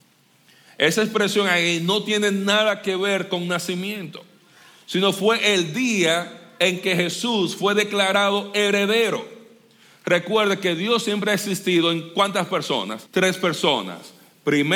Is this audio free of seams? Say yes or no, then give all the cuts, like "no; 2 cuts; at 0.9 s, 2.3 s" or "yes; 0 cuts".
no; 1 cut; at 13.1 s